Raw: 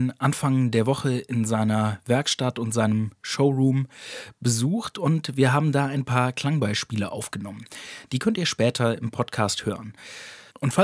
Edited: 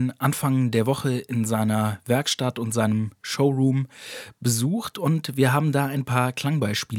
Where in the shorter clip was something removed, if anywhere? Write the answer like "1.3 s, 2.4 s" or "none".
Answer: none